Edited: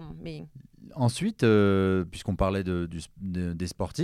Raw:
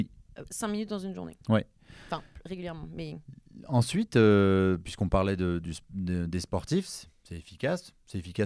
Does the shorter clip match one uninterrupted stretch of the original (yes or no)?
yes